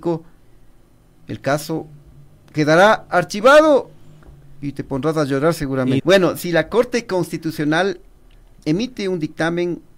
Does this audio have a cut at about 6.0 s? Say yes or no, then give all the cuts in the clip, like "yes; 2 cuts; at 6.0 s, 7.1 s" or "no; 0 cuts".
yes; 1 cut; at 6.0 s